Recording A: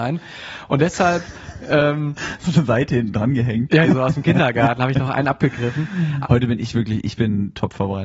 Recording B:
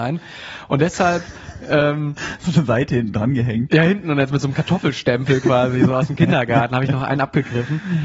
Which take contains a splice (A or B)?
A